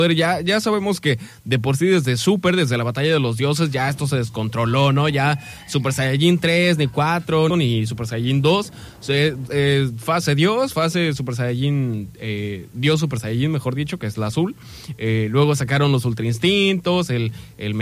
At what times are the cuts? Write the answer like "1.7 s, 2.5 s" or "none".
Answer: 7.5 s, 9.5 s